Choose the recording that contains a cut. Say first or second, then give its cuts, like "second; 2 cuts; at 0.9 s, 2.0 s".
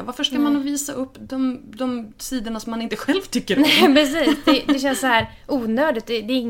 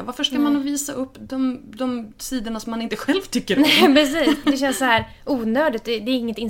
second; 1 cut; at 4.4 s